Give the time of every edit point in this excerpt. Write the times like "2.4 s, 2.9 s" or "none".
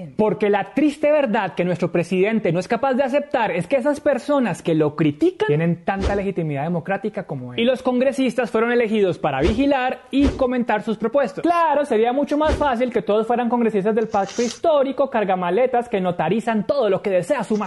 none